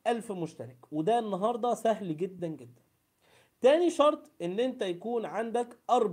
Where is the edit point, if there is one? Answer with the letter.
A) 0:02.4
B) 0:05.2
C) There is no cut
A